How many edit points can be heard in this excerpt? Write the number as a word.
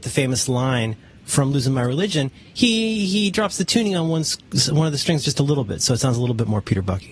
zero